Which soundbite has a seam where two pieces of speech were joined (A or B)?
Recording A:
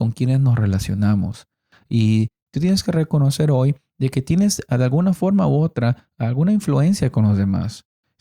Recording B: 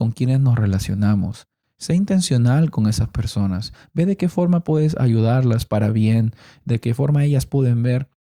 B